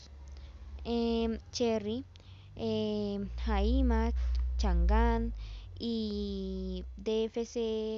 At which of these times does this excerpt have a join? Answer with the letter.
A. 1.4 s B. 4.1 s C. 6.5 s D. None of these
A